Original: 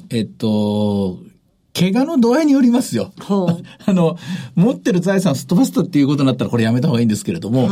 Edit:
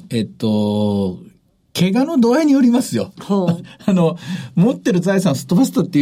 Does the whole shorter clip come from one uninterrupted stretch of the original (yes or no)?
yes